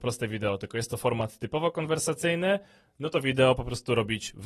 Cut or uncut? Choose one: uncut